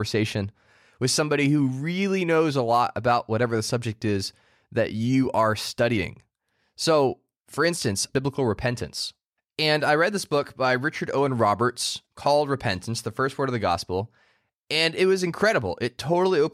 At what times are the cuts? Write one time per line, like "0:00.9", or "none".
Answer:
0:08.1